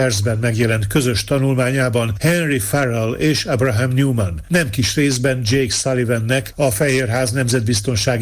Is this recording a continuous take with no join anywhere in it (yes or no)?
yes